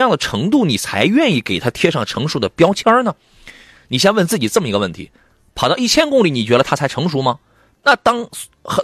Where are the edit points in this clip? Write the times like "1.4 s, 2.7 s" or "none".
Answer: none